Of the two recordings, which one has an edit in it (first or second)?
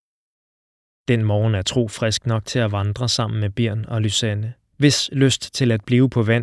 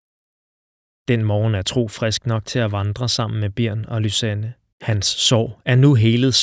second